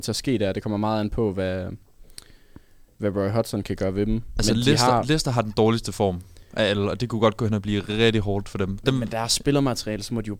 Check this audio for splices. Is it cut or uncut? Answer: uncut